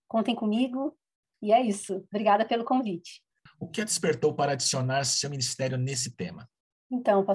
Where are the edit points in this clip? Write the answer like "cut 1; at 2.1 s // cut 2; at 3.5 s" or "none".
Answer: cut 1; at 3.5 s